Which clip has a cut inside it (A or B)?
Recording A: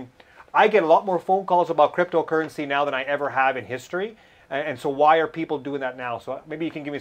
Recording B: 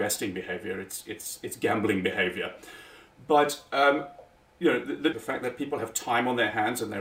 B